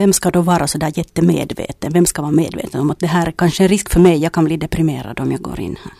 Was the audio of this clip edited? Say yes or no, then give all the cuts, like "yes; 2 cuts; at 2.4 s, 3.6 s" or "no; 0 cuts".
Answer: no; 0 cuts